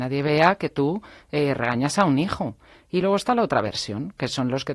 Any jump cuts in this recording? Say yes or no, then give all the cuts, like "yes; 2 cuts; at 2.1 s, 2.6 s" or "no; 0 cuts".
no; 0 cuts